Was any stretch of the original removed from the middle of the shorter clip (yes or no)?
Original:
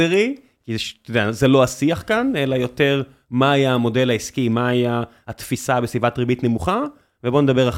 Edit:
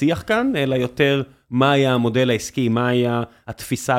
no